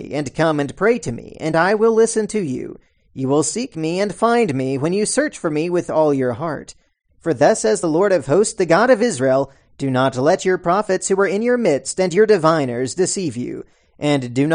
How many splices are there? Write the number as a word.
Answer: one